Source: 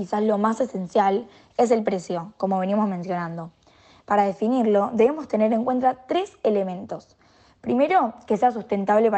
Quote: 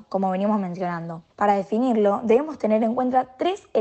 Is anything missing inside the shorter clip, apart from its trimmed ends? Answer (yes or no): yes